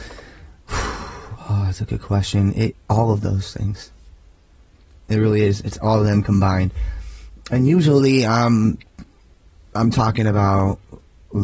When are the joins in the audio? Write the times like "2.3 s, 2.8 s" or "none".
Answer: 2.7 s